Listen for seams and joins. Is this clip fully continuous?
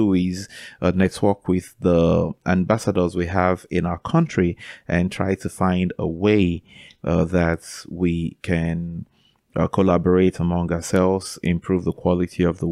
yes; 0 cuts

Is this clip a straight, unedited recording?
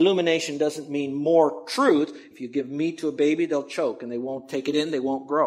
no; 1 cut; at 2.3 s

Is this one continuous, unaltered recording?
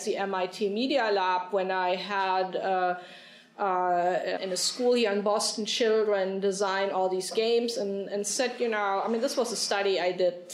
no; 1 cut; at 4.4 s

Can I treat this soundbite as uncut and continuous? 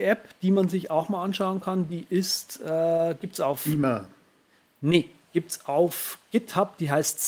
yes; 0 cuts

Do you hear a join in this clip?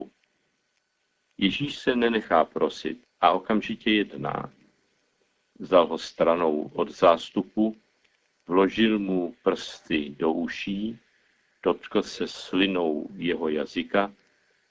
no; 0 cuts

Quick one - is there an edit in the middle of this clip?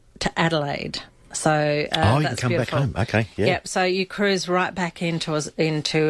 no; 0 cuts

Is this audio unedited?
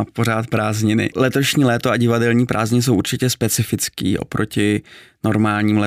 no; 1 cut; at 1.1 s

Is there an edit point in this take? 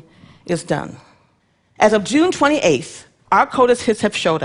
yes; 1 cut; at 3.2 s

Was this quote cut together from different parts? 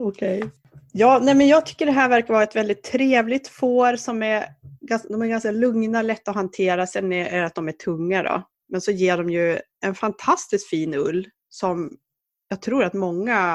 no; 0 cuts

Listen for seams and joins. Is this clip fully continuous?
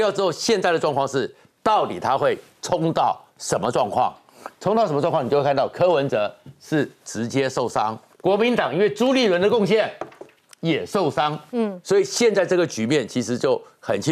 no; 1 cut; at 8.1 s

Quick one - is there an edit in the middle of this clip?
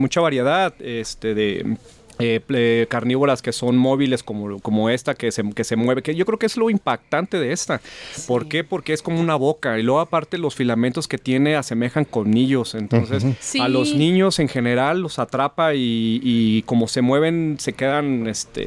no; 0 cuts

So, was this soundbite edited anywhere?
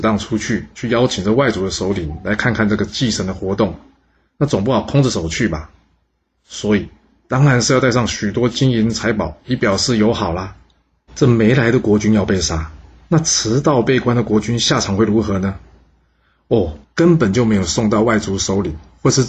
yes; 2 cuts; at 11.1 s, 16.8 s

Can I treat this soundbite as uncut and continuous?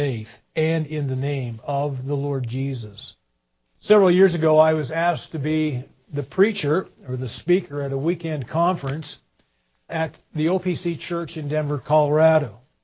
no; 2 cuts; at 3.6 s, 9.9 s

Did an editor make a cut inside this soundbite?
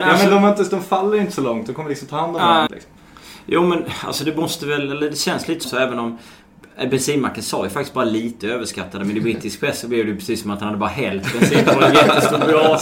yes; 2 cuts; at 2.7 s, 5.6 s

